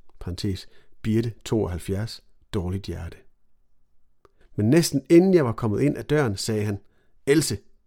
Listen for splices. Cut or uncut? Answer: cut